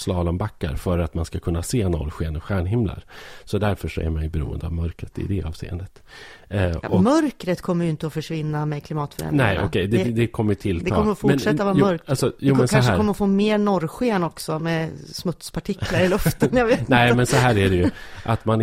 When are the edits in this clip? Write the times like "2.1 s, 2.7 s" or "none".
6.4 s